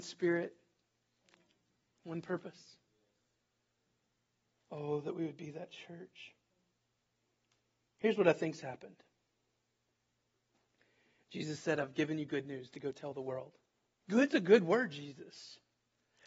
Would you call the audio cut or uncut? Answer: cut